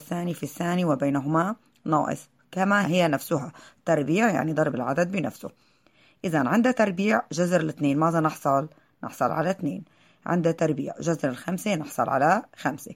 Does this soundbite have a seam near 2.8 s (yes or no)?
yes